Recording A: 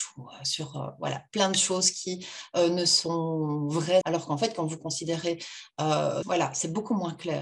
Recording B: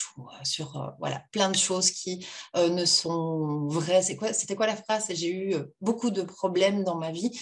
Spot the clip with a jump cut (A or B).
A